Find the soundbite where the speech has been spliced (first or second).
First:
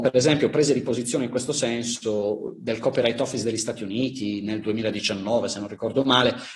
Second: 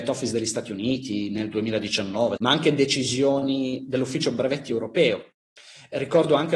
second